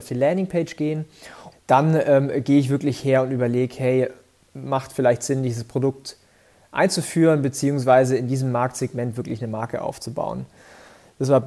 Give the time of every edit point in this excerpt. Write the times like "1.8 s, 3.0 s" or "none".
1.5 s